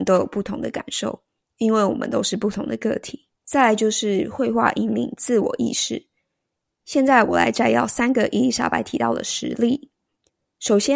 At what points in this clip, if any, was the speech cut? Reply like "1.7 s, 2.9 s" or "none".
3.4 s, 6.8 s